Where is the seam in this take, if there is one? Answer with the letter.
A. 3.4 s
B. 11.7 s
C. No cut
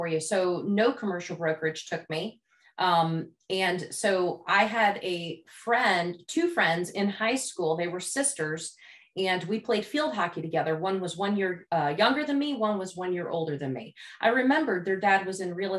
C